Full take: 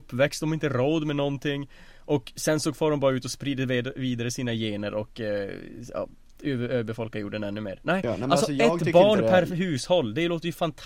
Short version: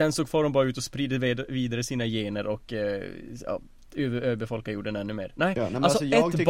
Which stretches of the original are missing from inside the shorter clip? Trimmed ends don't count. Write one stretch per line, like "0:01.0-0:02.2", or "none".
none